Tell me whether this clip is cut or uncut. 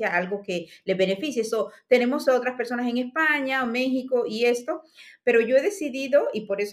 uncut